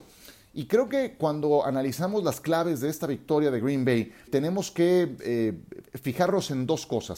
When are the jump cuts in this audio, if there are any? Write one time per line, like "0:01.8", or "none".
0:04.3